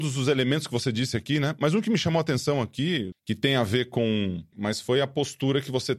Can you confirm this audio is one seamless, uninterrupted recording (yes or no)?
no